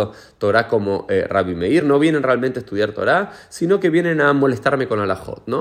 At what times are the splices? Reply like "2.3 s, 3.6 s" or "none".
none